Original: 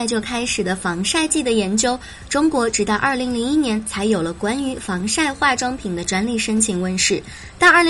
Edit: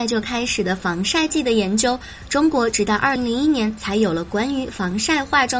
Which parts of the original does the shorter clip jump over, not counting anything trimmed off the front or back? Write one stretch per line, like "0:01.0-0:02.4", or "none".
0:03.2-0:03.2